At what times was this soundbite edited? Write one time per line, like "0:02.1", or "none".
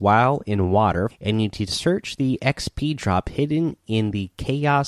0:01.1